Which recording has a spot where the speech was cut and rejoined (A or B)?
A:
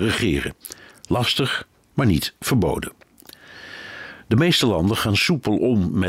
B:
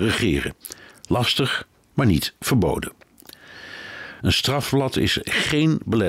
B